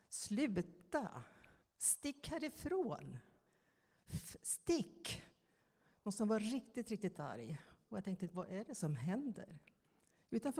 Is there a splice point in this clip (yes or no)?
no